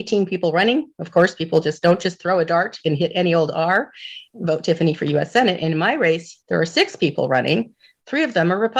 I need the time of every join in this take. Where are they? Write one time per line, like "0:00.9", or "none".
0:06.4